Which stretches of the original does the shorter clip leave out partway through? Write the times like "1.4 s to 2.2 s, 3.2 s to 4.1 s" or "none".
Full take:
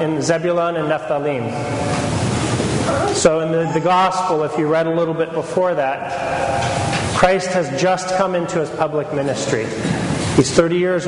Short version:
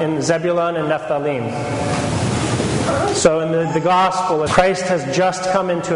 4.5 s to 7.1 s